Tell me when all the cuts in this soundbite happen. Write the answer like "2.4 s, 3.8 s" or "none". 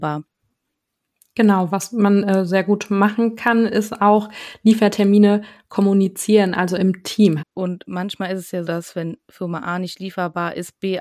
7.4 s, 8.6 s